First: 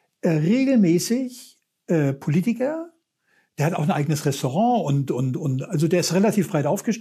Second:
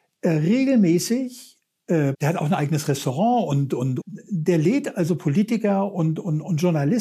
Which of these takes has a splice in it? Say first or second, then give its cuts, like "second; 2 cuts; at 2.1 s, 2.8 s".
second; 2 cuts; at 2.1 s, 4.0 s